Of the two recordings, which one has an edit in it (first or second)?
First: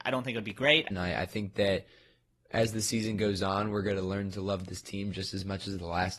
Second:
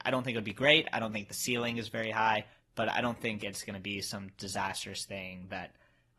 first